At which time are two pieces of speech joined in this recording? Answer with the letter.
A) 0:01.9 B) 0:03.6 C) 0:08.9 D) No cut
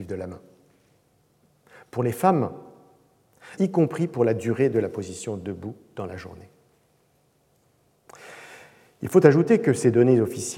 B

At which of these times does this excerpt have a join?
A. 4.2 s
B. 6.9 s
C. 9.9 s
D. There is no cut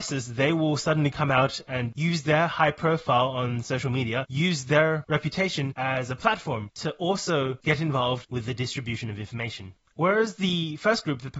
C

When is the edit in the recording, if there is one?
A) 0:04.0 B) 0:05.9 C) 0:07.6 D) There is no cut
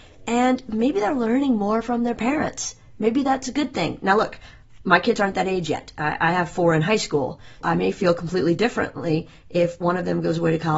C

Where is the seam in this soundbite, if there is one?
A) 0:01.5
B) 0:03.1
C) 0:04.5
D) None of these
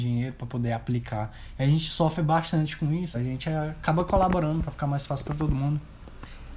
B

